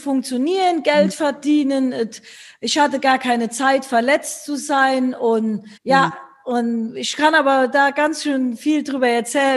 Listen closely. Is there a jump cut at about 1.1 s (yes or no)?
no